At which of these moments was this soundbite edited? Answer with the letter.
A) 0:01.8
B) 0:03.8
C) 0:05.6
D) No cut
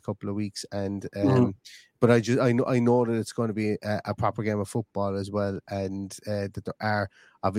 D